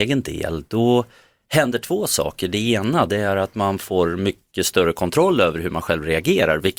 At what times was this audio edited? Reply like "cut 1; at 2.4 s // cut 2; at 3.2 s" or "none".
none

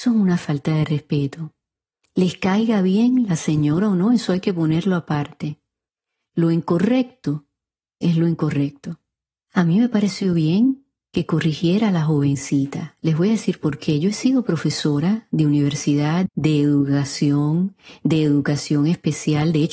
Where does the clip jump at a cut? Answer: cut 1; at 16.3 s

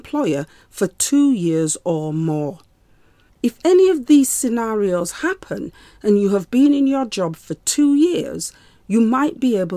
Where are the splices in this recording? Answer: cut 1; at 3.3 s

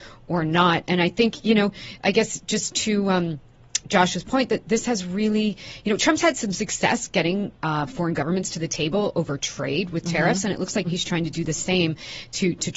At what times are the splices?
cut 1; at 3.8 s // cut 2; at 10.9 s

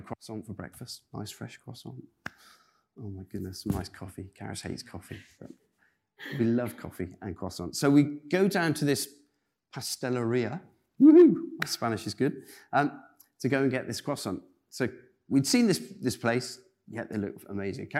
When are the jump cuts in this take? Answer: none

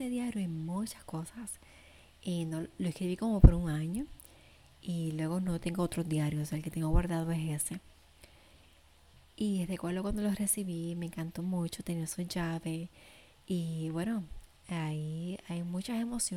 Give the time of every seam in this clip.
none

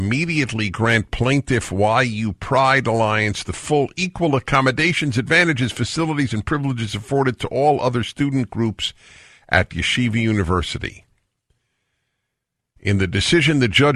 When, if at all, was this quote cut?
none

